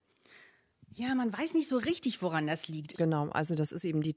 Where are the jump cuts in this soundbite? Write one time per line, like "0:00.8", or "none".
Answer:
0:02.9